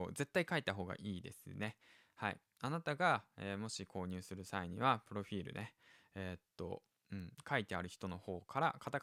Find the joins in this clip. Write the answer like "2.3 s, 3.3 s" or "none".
none